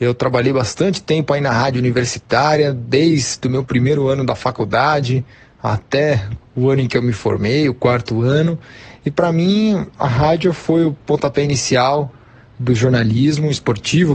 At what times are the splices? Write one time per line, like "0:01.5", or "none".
none